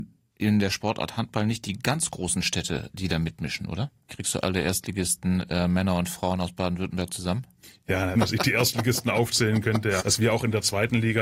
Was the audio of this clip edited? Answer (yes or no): yes